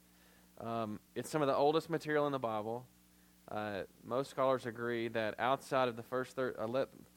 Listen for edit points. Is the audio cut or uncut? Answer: cut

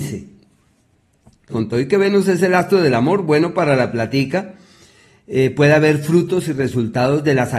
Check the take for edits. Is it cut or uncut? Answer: cut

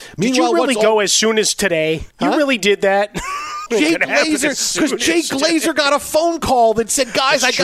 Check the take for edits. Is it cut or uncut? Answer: cut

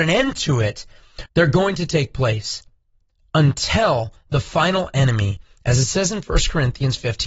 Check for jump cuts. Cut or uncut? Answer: cut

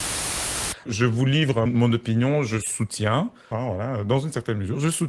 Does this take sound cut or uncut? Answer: cut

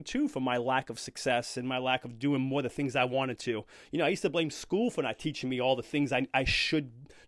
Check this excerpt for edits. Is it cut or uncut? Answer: uncut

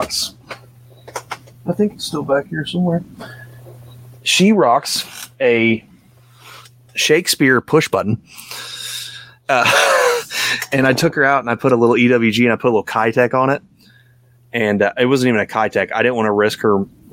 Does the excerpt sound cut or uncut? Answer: uncut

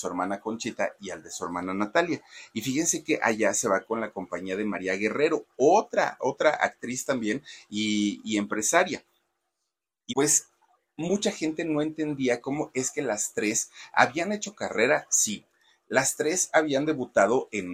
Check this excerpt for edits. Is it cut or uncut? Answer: cut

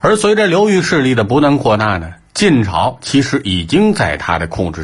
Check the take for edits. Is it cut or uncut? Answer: uncut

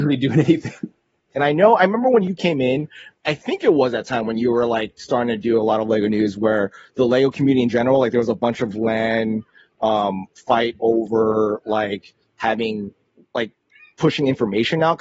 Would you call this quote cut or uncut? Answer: cut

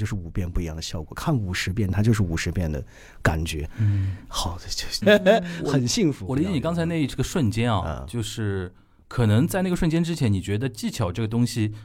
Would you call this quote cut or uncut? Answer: cut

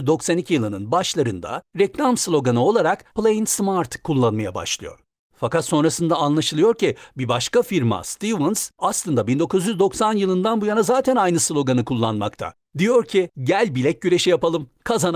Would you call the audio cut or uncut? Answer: cut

